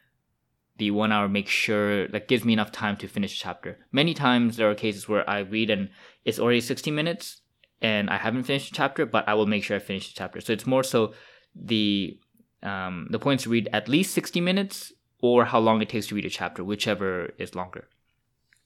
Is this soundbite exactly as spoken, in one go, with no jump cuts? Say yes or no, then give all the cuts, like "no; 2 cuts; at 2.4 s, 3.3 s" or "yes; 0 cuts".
yes; 0 cuts